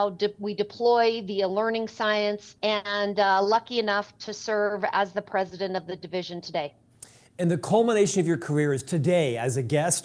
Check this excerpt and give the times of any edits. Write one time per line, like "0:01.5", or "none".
0:02.6